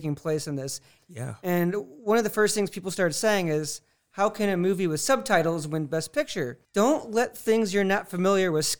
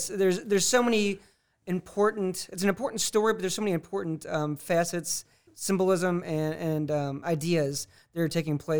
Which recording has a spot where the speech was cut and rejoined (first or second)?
first